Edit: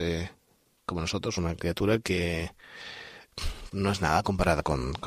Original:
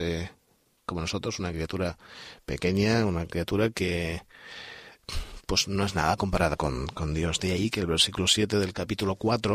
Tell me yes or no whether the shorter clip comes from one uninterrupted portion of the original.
no